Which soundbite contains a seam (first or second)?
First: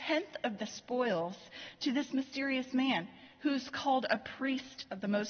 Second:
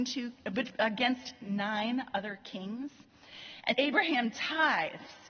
second